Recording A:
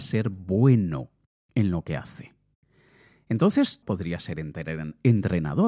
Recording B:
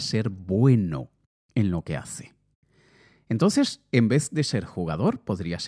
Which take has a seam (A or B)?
A